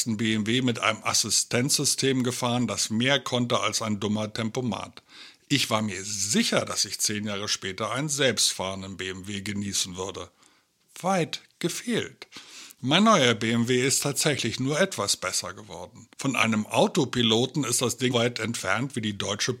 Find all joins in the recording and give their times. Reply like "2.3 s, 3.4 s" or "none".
16.1 s, 18.1 s